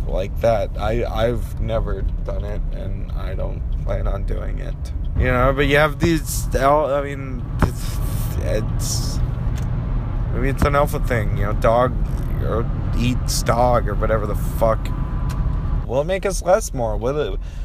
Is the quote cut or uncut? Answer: cut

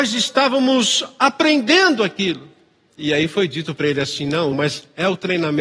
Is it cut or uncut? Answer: cut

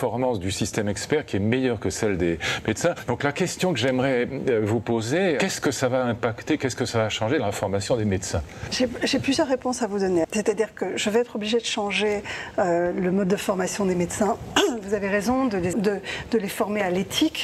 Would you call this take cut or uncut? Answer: cut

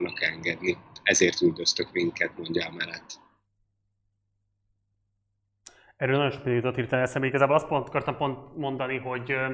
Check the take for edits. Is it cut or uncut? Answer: uncut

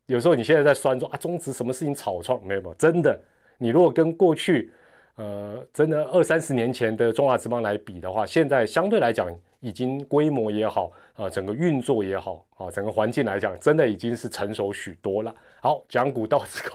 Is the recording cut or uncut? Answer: uncut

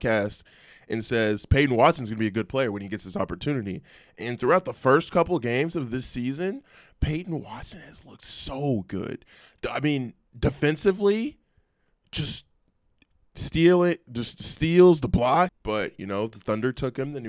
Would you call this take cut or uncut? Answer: cut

